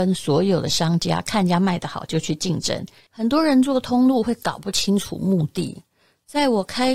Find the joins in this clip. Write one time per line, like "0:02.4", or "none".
0:03.1